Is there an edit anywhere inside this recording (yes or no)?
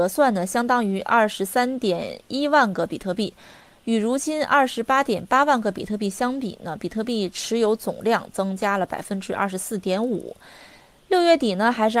no